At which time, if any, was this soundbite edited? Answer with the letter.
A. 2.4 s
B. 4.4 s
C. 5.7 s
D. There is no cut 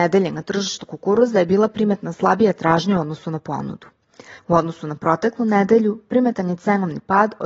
B